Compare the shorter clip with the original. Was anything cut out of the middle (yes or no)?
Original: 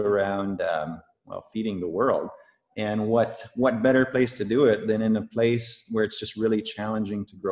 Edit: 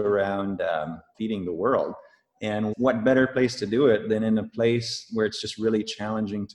yes